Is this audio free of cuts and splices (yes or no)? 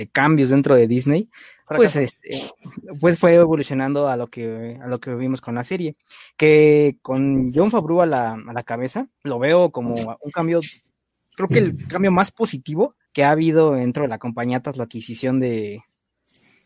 no